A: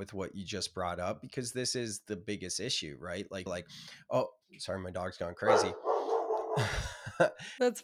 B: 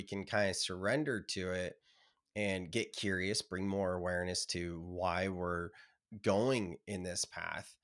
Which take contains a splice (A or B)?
A